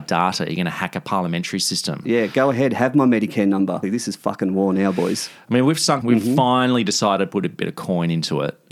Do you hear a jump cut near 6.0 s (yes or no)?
yes